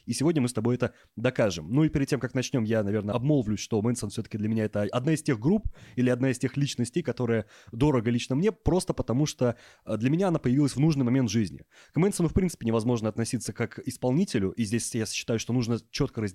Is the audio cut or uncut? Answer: uncut